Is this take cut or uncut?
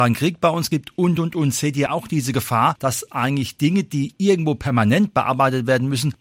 uncut